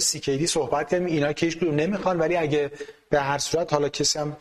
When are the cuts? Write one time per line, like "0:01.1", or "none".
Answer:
none